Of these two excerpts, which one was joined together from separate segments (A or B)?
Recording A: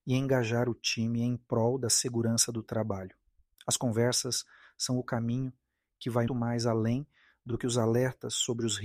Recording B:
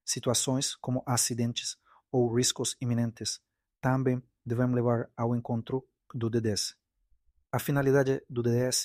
A